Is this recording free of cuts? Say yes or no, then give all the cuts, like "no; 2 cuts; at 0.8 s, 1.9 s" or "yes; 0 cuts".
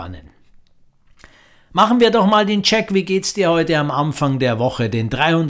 yes; 0 cuts